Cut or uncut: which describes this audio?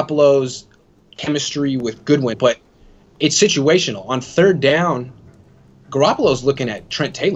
cut